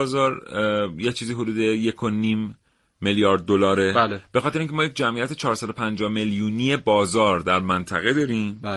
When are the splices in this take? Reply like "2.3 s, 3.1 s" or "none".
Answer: none